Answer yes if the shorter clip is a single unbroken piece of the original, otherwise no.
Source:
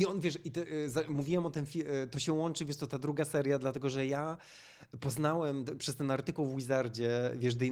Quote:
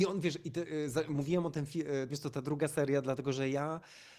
no